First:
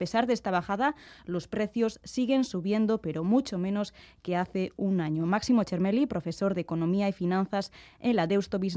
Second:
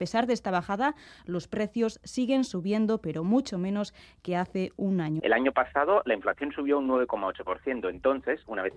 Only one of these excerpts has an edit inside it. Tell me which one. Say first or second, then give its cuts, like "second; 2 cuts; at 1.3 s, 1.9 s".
second; 1 cut; at 5.2 s